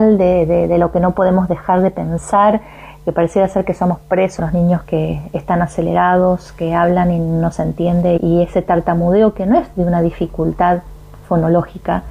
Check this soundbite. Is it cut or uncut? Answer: cut